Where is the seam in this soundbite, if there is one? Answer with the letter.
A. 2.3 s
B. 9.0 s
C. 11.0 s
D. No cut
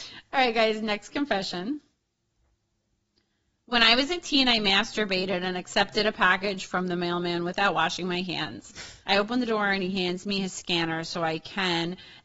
B